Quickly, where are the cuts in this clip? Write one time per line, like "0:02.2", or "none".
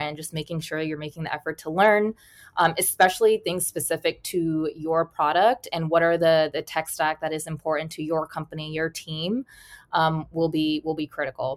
none